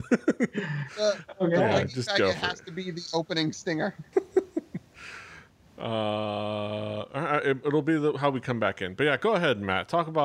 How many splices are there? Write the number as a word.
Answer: one